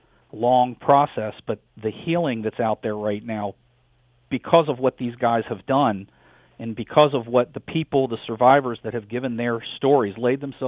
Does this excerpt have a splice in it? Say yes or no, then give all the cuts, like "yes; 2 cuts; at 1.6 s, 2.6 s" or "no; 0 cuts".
no; 0 cuts